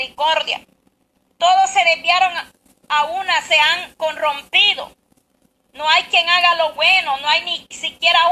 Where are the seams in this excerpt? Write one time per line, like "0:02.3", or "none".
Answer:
none